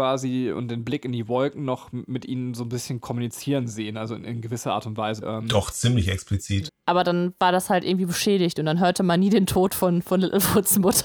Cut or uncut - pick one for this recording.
cut